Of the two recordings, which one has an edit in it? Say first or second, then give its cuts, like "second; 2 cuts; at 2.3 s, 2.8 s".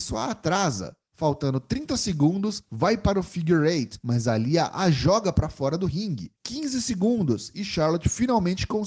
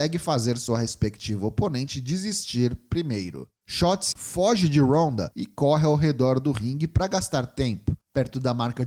second; 1 cut; at 4.1 s